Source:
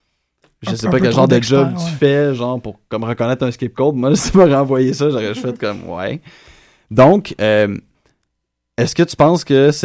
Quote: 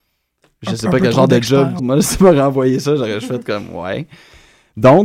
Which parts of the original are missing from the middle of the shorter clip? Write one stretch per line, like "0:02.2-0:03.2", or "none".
0:01.8-0:03.9